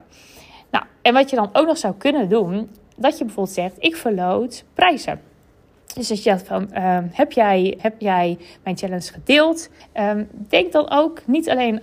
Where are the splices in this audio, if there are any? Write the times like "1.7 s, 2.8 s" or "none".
7.8 s, 9.8 s

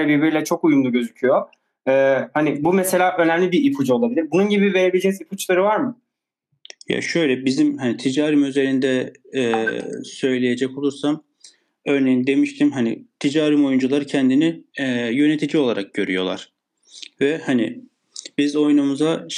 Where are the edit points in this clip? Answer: 14.7 s

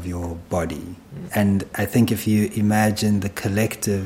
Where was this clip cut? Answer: 1.3 s

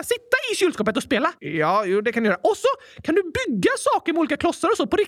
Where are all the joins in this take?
1.4 s

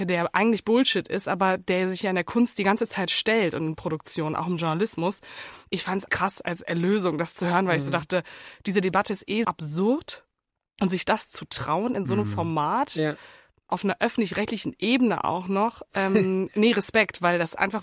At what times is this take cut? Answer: 6.1 s, 9.4 s

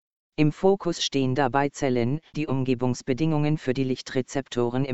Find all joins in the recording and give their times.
2.3 s

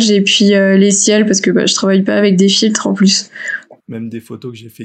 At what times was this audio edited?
3.8 s

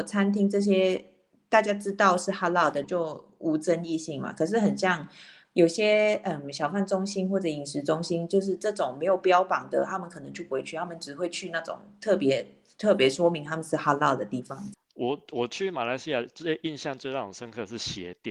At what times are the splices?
2.8 s, 14.7 s

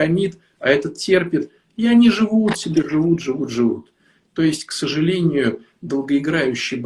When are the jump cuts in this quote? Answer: none

